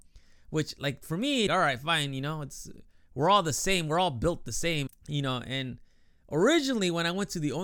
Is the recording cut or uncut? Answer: cut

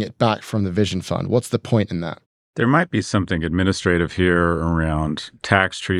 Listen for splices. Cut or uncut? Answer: uncut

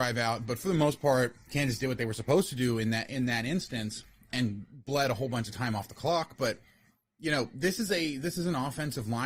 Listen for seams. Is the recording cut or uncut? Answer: uncut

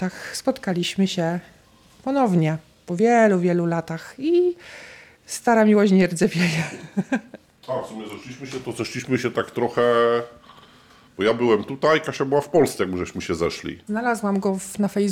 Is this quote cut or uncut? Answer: uncut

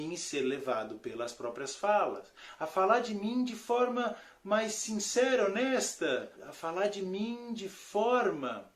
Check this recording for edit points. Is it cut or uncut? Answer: cut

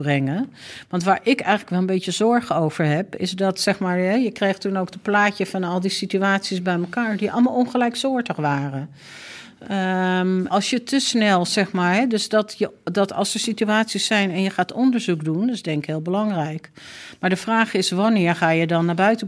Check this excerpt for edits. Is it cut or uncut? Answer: cut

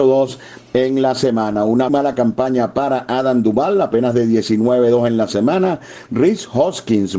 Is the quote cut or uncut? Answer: cut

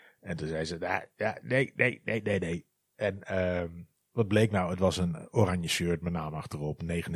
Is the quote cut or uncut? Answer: uncut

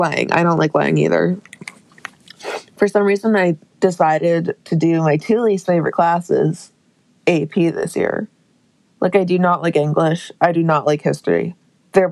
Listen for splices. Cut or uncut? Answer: uncut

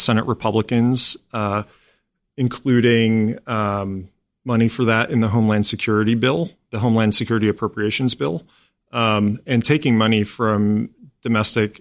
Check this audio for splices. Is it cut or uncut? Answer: uncut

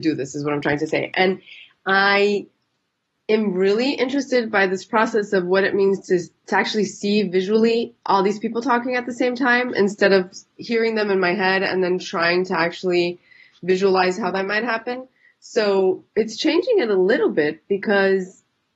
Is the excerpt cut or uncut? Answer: uncut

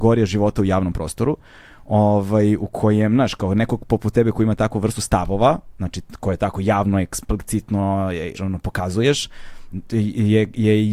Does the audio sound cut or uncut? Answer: cut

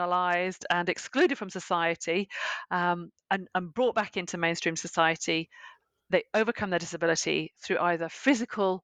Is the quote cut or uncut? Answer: uncut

